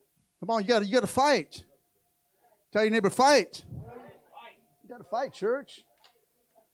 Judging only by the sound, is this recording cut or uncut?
uncut